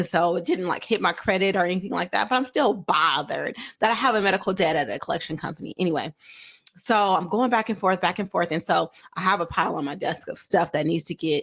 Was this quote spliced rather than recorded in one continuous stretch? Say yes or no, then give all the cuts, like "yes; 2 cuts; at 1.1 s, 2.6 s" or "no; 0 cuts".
no; 0 cuts